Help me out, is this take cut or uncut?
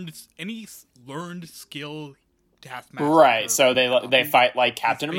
uncut